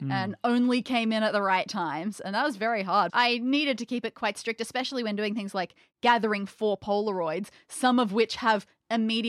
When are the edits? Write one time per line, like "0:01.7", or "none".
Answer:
0:03.1